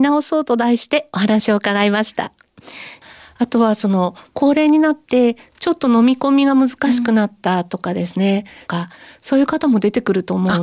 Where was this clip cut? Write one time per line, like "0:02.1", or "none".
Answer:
0:03.0
0:08.7